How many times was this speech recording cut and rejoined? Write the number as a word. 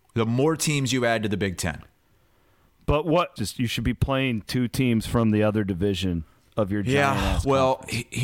one